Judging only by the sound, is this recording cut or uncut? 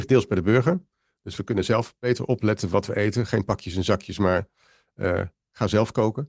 uncut